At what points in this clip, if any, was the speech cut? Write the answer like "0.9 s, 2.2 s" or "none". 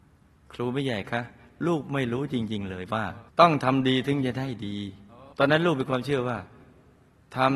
3.3 s, 5.3 s